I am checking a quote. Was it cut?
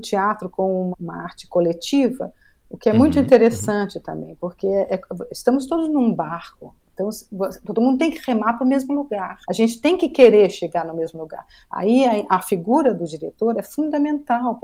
yes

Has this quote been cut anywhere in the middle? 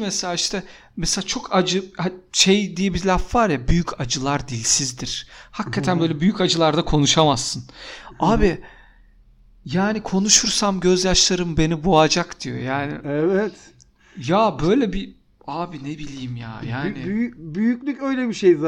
no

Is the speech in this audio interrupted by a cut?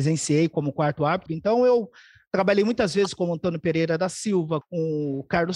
yes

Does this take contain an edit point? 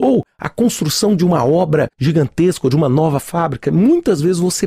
no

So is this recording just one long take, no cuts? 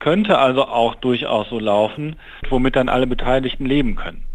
no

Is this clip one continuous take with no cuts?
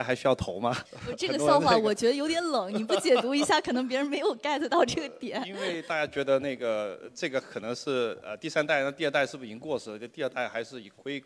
yes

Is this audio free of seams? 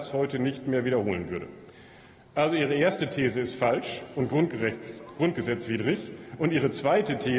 yes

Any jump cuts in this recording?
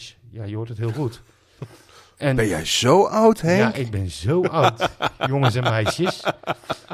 no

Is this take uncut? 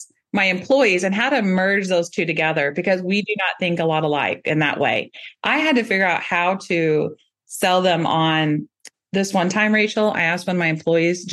yes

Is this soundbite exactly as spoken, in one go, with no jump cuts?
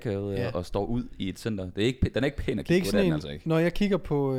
yes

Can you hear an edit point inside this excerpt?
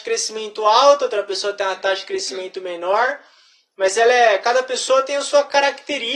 no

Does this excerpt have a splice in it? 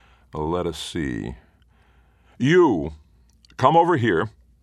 no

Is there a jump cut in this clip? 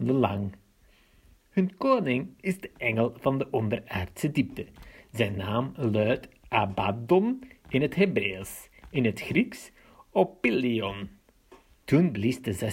yes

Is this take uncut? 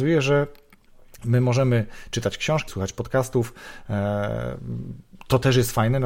no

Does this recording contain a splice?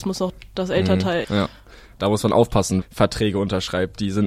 yes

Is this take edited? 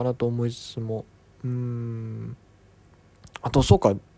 no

